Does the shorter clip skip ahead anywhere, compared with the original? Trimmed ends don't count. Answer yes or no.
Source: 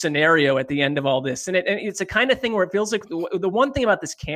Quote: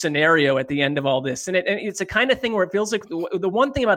no